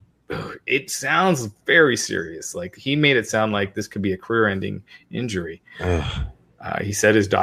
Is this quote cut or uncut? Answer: uncut